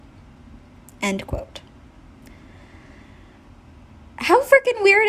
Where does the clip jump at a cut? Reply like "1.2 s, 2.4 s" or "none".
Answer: none